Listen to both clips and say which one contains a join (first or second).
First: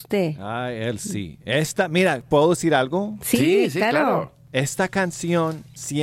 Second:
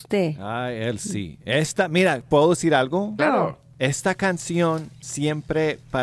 second